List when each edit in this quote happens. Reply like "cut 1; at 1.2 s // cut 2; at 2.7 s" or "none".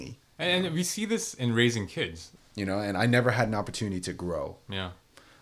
cut 1; at 2.4 s